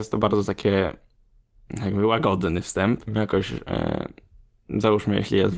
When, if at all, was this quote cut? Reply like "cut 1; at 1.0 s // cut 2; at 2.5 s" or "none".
cut 1; at 3.1 s